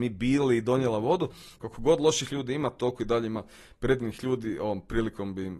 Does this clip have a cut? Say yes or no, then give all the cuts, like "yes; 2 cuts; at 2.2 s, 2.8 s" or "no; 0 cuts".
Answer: yes; 1 cut; at 1.6 s